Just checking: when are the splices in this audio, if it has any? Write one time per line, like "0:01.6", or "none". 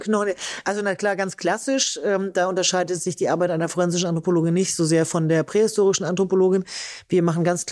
none